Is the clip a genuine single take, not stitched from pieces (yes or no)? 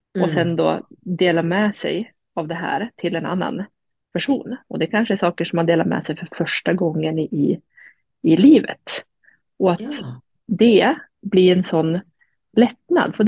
yes